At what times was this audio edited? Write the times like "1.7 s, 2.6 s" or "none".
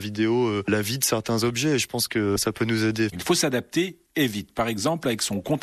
3.1 s